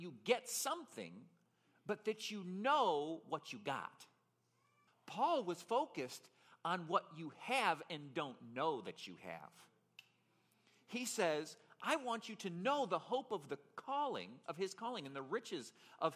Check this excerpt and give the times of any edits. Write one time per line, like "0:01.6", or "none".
0:04.9